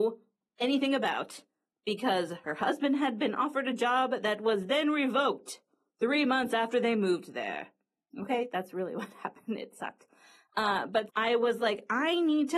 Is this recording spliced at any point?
yes; 1 cut; at 11.1 s

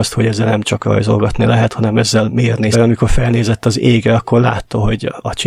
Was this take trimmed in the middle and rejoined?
yes; 1 cut; at 2.7 s

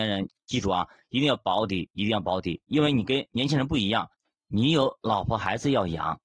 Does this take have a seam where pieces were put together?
no; 0 cuts

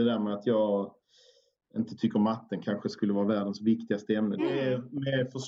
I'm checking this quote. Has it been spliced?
yes; 1 cut; at 4.4 s

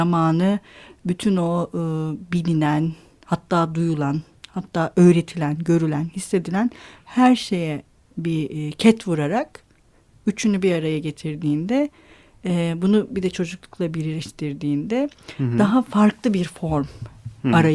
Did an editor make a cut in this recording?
no; 0 cuts

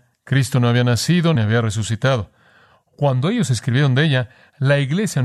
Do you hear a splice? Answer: yes; 1 cut; at 1.3 s

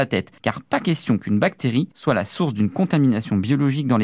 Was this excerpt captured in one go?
yes; 0 cuts

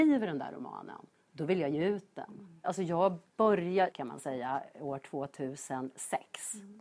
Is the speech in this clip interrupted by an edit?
yes; 2 cuts; at 2.6 s, 3.9 s

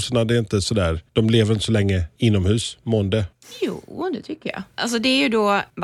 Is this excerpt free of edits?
no; 1 cut; at 4.7 s

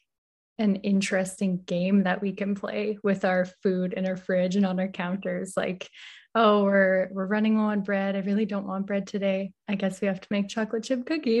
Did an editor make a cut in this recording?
no; 0 cuts

